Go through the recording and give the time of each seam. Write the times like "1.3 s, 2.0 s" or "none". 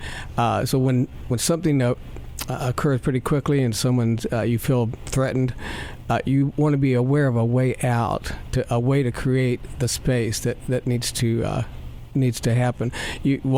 none

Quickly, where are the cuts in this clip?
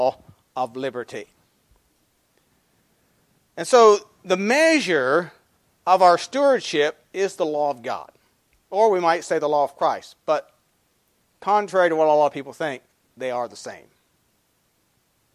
none

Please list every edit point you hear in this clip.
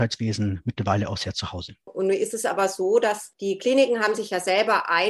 1.9 s

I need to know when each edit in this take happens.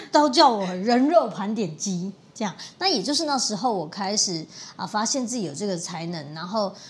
none

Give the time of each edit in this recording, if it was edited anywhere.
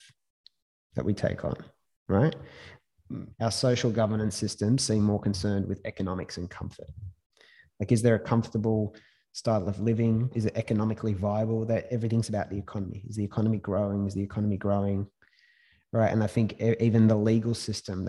3.3 s

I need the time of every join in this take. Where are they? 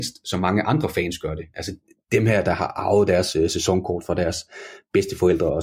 none

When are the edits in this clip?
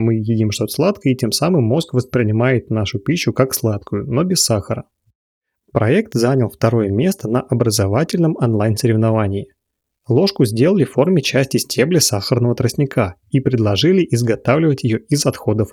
none

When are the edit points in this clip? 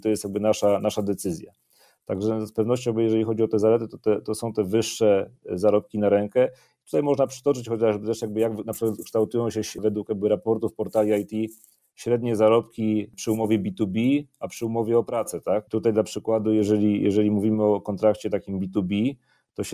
none

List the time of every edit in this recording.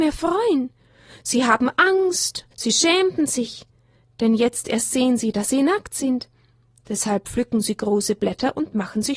2.5 s

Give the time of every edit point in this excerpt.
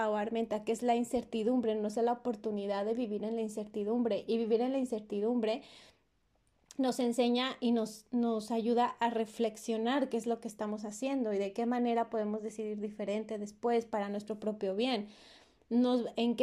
none

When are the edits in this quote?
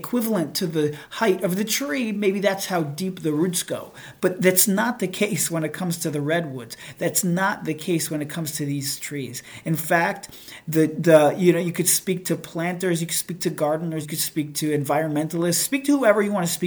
14.0 s

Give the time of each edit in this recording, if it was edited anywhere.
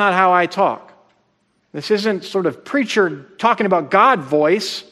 1.6 s

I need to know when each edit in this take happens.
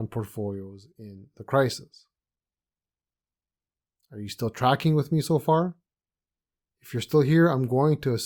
none

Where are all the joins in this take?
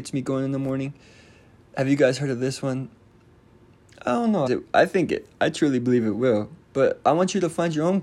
4.5 s, 6.6 s

